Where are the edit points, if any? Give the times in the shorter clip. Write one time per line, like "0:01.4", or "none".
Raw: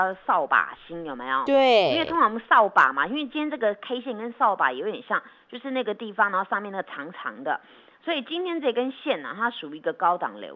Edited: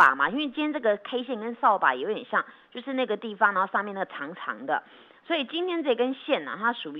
none